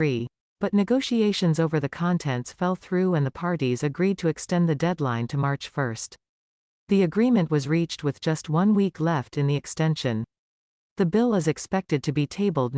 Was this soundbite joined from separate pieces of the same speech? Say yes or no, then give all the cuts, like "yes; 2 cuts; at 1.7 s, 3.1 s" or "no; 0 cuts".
no; 0 cuts